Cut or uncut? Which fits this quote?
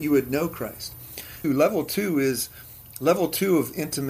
cut